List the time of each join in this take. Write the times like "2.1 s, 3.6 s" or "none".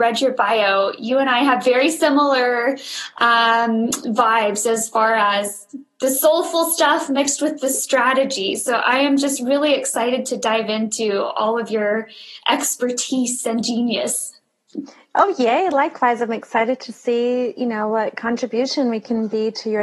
none